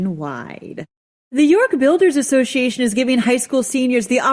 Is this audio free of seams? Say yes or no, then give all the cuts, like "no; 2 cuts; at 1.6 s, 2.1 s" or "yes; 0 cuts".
yes; 0 cuts